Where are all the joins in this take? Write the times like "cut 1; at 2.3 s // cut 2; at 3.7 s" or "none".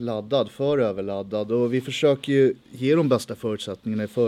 none